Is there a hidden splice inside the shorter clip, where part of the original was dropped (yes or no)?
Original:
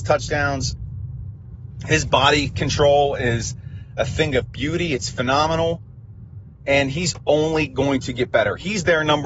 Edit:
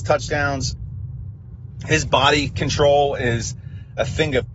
no